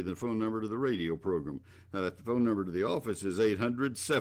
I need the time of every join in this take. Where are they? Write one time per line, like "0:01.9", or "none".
none